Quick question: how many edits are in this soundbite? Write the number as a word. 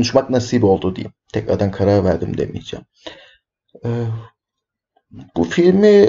zero